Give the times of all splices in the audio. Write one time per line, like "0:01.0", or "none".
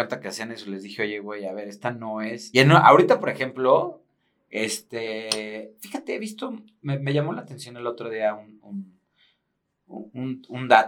0:02.5

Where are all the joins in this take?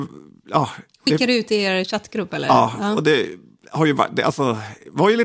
none

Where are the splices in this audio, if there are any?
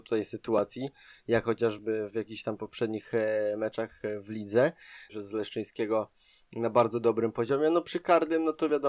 0:05.1

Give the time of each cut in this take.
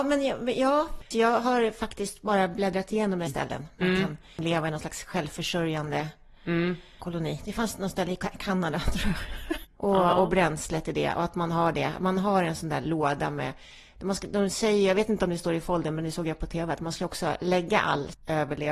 0:03.3
0:09.6

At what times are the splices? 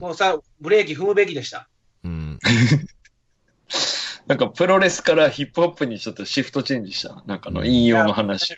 none

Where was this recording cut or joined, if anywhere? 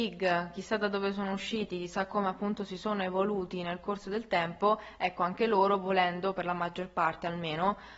none

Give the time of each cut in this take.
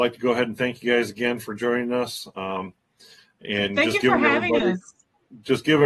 none

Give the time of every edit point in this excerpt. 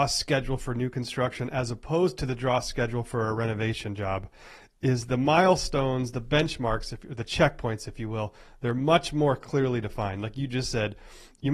none

